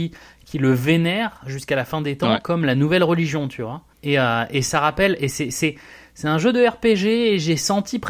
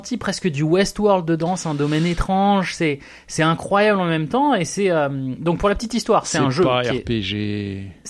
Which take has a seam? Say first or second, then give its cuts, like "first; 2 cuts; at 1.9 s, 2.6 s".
first; 1 cut; at 3.9 s